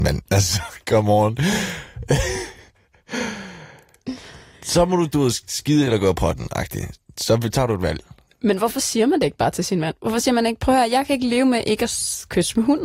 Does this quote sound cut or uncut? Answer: cut